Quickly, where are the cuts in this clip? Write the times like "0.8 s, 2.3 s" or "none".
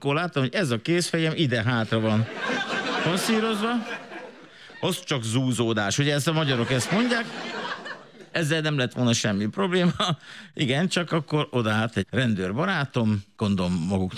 none